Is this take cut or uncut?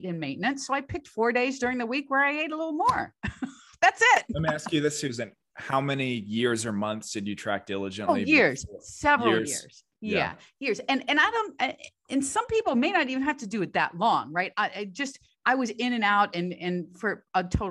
uncut